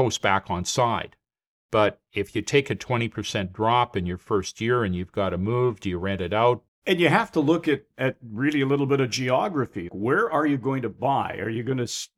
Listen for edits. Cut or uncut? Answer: cut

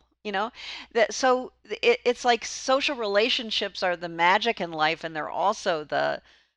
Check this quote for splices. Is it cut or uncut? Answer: uncut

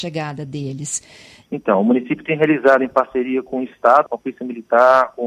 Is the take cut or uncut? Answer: cut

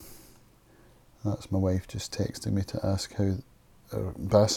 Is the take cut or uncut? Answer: uncut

